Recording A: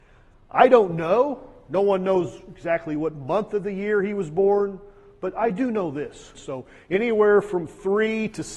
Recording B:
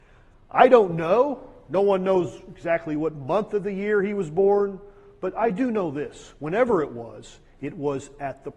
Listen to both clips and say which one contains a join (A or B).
A